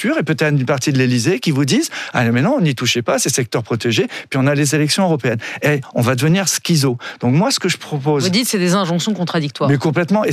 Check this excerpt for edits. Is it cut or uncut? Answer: uncut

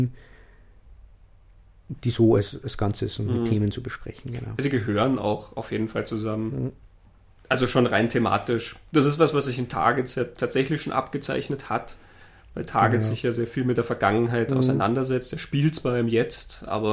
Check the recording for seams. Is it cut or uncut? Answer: uncut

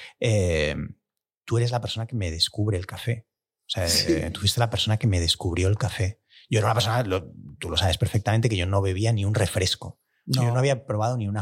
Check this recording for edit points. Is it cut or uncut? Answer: uncut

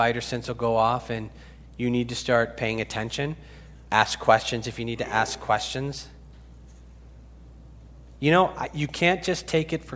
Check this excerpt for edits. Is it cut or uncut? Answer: uncut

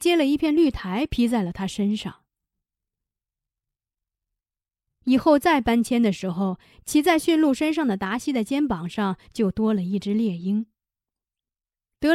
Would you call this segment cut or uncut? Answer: uncut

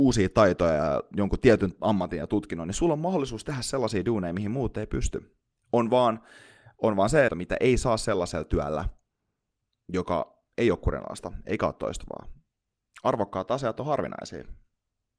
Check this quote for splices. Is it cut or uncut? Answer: cut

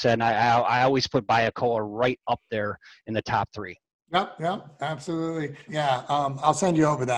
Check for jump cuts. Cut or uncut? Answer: cut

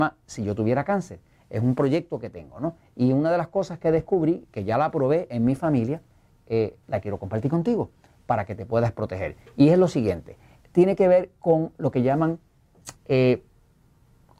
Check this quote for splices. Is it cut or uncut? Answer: cut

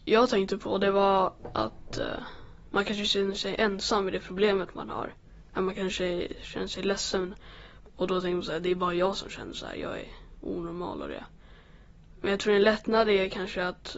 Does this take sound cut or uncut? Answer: uncut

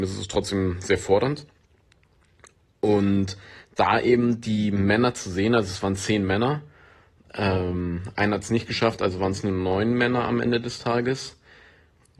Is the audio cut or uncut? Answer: uncut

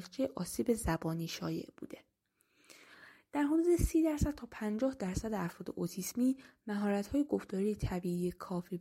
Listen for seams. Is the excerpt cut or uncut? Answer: uncut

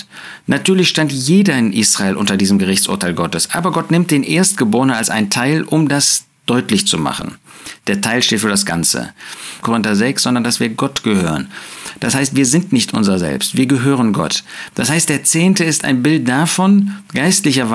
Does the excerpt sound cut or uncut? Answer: cut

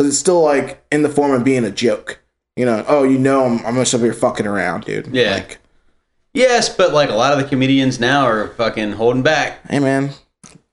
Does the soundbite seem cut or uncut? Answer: uncut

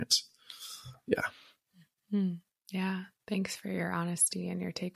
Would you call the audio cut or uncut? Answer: uncut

